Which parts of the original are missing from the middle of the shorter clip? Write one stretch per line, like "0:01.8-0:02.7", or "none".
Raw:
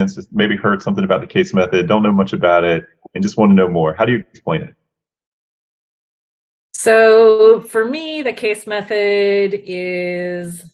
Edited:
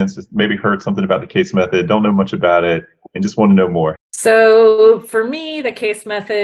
0:04.0-0:06.6